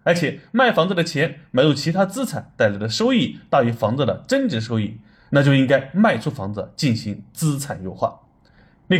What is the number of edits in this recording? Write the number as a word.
zero